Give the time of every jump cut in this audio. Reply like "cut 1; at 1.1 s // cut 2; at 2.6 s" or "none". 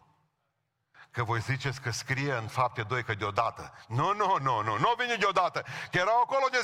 cut 1; at 4.4 s

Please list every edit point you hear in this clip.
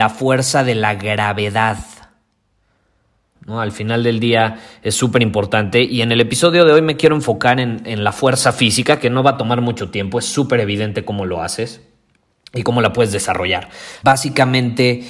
cut 1; at 3.3 s // cut 2; at 14.0 s

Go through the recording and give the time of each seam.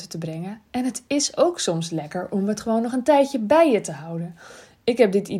none

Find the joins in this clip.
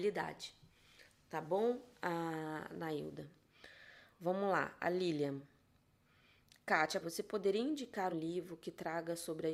cut 1; at 7.0 s // cut 2; at 8.1 s

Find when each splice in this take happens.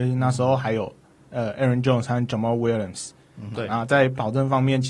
cut 1; at 3.5 s

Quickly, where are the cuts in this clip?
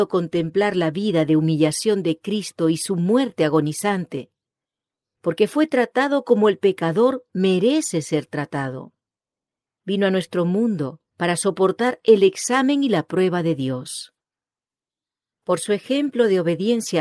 cut 1; at 11.1 s

